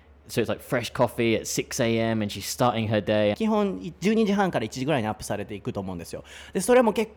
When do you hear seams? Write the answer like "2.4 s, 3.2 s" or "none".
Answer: 3.3 s